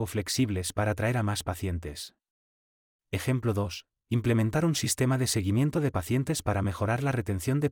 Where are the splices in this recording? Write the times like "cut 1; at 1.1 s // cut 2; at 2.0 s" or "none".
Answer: none